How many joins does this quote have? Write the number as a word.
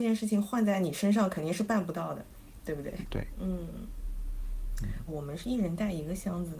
two